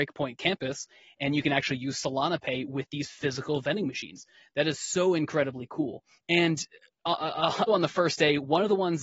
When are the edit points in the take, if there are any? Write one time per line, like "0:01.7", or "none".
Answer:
0:06.2
0:07.7